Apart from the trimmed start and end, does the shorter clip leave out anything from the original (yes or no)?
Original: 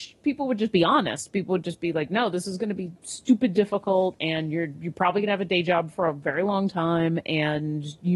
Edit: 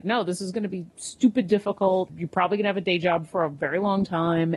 yes